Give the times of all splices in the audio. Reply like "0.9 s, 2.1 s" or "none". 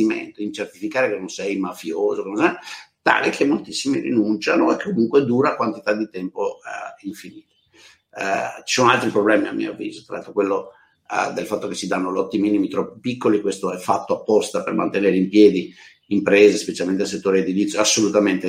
none